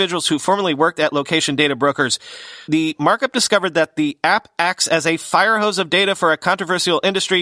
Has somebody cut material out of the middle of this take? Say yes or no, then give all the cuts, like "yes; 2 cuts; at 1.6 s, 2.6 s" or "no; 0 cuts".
yes; 1 cut; at 2.7 s